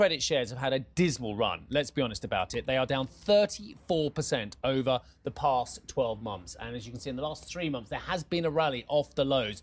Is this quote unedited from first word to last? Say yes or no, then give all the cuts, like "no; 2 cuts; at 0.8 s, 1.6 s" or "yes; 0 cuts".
yes; 0 cuts